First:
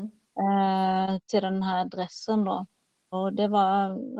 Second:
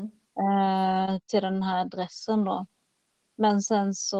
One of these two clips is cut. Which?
first; 1 cut; at 3.1 s

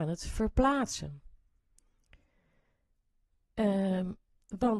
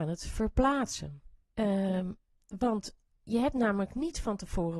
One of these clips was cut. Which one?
second; 1 cut; at 1.4 s

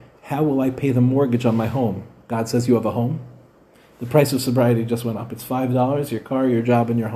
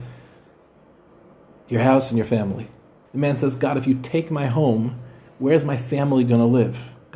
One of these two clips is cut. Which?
second; 1 cut; at 3.0 s

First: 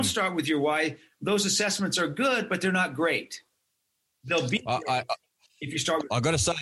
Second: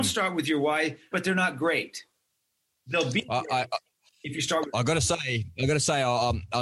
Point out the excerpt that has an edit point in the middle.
second; 1 cut; at 1.1 s

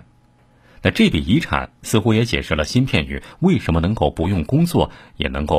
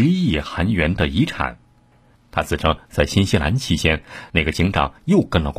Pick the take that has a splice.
second; 1 cut; at 2.1 s

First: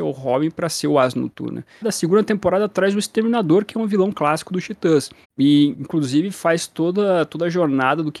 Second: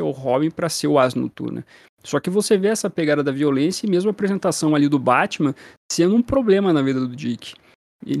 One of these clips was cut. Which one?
first; 2 cuts; at 1.8 s, 5.2 s

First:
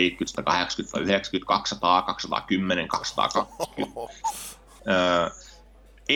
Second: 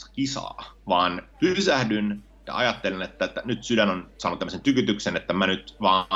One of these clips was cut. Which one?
first; 1 cut; at 4.8 s

